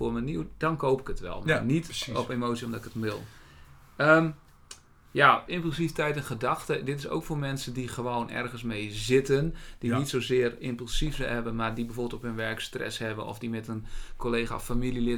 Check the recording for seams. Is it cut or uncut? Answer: cut